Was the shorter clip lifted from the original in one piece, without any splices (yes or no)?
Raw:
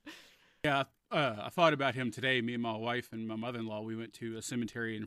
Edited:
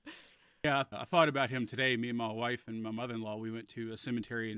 no